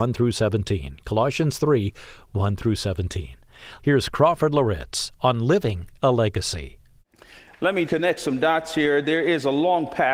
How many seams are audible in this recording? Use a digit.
2